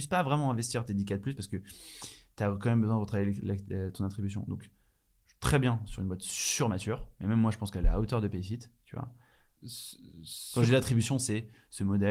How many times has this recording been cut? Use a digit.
1